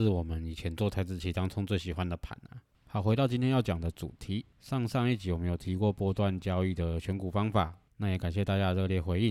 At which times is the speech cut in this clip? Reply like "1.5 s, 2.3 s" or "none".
none